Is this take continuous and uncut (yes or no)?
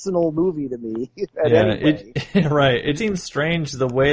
no